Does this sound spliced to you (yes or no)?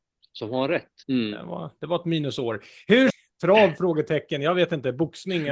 yes